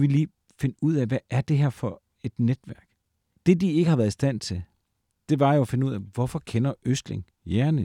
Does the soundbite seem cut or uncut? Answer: uncut